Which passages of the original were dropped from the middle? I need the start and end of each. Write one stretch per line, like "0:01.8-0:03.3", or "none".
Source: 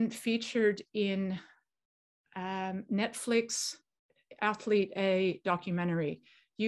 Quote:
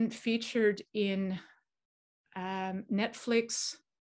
none

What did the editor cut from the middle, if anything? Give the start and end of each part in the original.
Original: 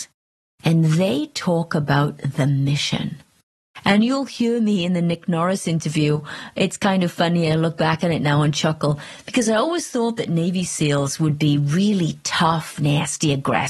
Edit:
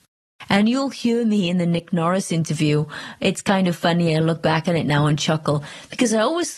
none

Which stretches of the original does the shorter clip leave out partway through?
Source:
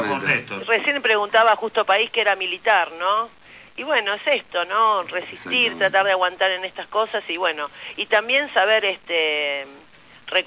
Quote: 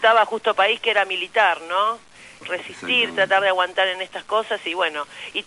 0:03.7-0:05.0

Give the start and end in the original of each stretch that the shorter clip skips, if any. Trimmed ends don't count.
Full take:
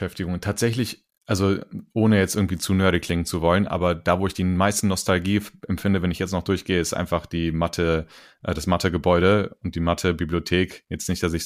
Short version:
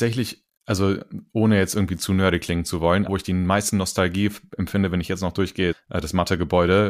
0:03.7-0:04.2
0:06.8-0:08.2

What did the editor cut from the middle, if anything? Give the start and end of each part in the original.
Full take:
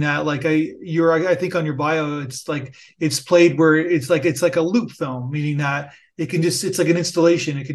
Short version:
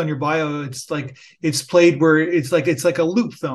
none

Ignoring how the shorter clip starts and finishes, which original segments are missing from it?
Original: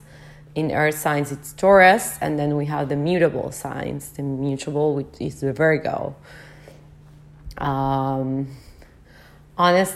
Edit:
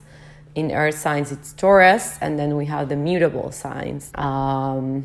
0:04.1-0:07.5

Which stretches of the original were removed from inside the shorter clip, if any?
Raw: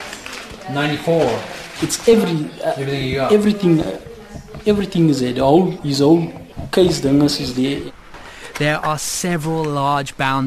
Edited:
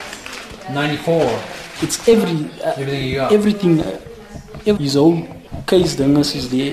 0:04.8-0:05.8

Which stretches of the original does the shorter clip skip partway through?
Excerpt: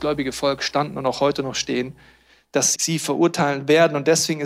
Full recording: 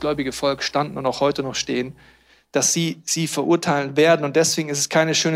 0:02.7-0:03.0

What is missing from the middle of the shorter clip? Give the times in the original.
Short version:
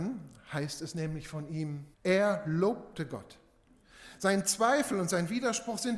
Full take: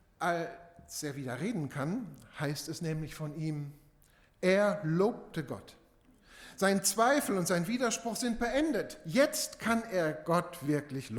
0:03.8-0:04.3

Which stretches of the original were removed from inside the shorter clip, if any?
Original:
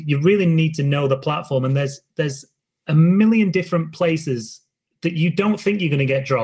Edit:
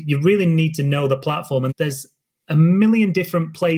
0:01.7-0:02.1

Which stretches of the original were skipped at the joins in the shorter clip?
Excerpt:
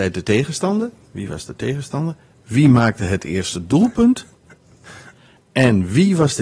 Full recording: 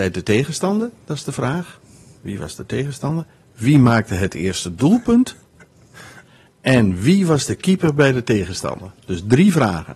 0:01.0-0:02.1

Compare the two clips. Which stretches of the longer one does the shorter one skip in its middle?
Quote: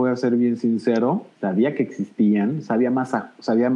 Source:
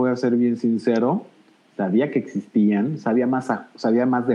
0:01.3-0:01.7

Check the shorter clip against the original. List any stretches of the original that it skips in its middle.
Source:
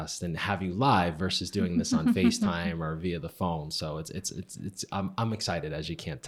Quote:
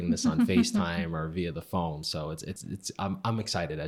0:04.2-0:04.5

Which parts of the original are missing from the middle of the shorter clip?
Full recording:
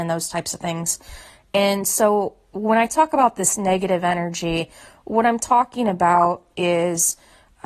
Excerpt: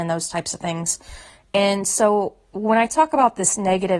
none

